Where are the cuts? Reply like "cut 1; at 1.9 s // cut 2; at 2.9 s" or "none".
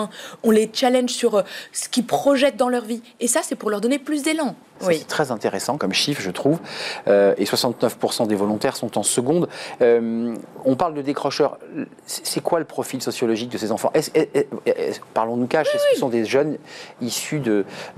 cut 1; at 4.8 s // cut 2; at 5.8 s